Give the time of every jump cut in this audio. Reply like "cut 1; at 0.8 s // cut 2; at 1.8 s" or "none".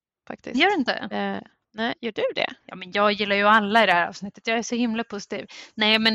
cut 1; at 2.6 s